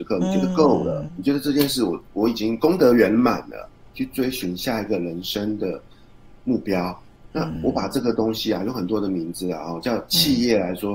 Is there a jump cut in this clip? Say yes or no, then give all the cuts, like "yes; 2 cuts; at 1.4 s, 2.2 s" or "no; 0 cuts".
yes; 2 cuts; at 1.1 s, 3.9 s